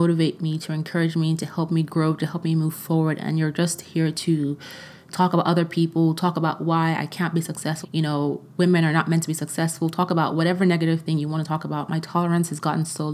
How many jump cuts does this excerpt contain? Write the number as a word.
one